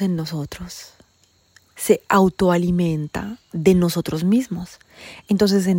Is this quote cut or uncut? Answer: uncut